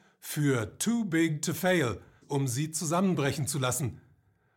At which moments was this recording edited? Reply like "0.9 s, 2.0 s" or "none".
2.2 s